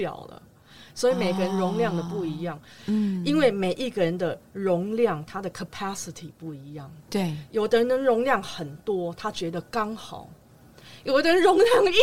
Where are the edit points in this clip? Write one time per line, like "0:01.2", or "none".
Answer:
0:02.8

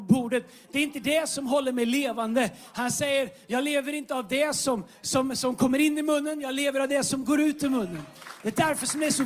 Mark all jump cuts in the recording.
none

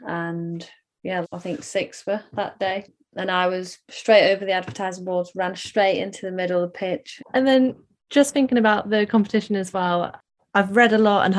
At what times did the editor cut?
0:01.2
0:07.2

